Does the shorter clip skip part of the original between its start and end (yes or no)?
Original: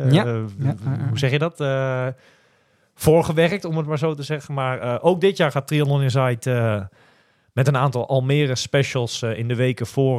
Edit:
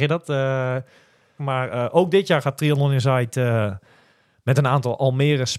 yes